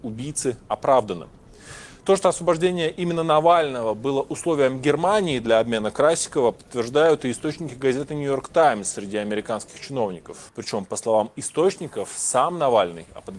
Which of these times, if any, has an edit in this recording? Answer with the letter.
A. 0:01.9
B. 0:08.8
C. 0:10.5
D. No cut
C